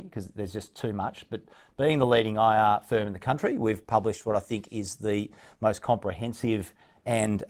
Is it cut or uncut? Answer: uncut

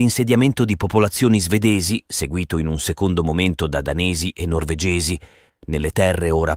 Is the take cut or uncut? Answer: cut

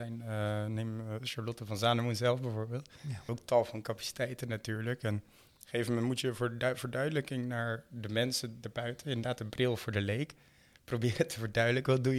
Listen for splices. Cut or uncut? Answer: cut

